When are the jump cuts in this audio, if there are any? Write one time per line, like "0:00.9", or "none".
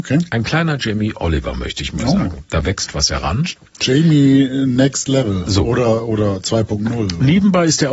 none